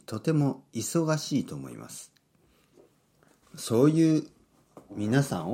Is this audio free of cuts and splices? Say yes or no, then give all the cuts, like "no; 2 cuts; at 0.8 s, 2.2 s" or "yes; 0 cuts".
no; 1 cut; at 3.4 s